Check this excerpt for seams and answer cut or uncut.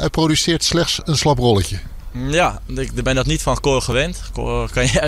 uncut